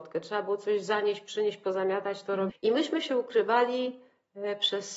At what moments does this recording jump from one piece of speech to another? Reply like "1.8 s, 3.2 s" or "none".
2.5 s